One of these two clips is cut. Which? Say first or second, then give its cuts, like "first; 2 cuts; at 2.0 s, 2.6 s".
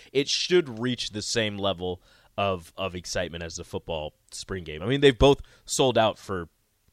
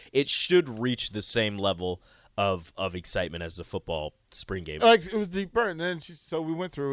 second; 1 cut; at 4.8 s